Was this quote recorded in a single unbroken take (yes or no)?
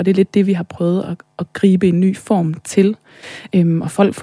yes